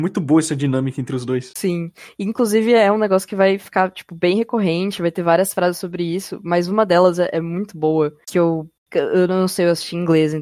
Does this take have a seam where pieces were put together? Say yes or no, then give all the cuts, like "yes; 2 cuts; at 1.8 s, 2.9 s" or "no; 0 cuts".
no; 0 cuts